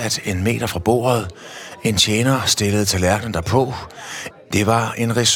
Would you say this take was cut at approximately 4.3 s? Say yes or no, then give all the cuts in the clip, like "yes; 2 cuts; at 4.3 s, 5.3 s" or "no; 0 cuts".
yes; 1 cut; at 4.3 s